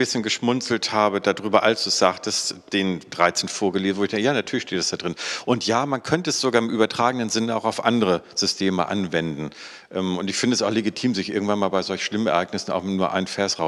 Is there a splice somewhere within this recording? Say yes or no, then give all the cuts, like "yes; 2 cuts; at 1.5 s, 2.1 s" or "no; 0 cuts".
no; 0 cuts